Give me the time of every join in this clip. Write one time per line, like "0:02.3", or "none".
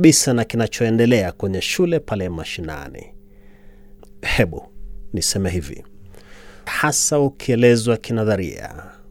0:04.0
0:06.7